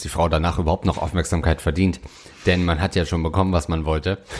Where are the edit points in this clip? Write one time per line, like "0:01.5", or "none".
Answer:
none